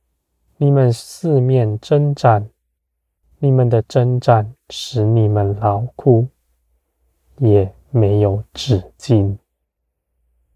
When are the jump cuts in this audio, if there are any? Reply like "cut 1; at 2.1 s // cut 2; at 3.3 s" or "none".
cut 1; at 3.2 s